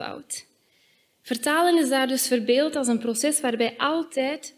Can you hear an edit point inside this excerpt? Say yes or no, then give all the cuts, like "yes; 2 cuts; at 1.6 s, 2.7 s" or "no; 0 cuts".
no; 0 cuts